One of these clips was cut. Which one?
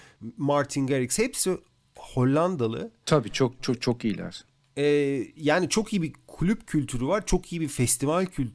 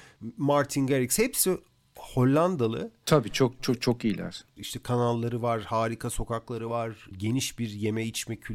second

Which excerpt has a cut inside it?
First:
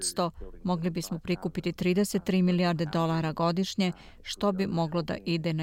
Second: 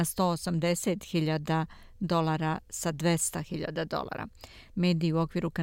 second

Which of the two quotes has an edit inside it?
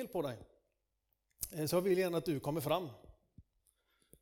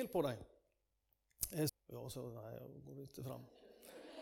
second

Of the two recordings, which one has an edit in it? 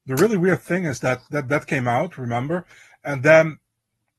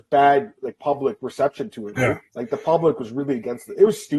second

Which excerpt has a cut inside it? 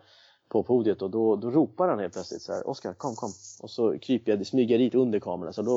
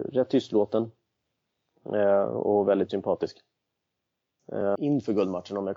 second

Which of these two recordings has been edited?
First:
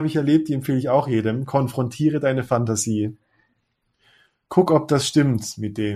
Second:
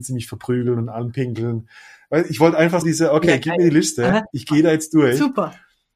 second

